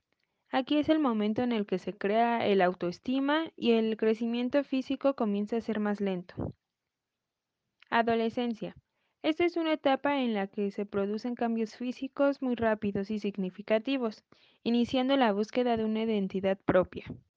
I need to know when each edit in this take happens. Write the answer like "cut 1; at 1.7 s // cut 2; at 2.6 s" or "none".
none